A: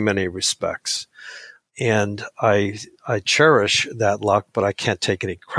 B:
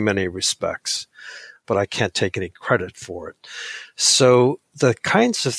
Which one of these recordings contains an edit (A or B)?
B